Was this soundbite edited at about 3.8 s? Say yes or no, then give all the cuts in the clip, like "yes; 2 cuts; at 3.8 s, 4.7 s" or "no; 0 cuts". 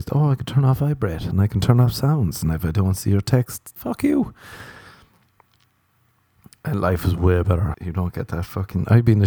yes; 2 cuts; at 3.8 s, 7.7 s